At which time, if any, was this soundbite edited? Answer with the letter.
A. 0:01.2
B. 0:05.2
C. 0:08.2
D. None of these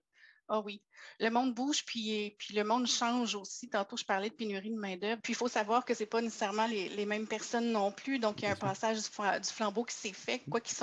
B